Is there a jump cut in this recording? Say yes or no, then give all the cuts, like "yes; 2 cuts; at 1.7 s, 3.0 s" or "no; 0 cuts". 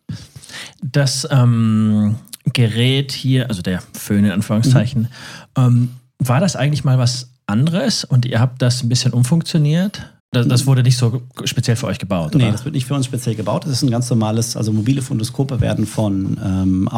yes; 1 cut; at 10.2 s